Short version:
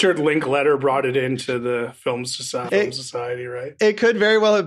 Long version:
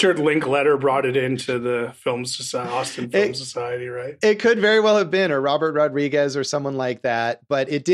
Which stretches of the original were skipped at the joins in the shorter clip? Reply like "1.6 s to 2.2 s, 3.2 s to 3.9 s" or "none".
2.7 s to 3.1 s